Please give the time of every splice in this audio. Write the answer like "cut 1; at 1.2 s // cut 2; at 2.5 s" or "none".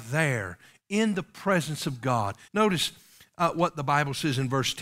cut 1; at 2.5 s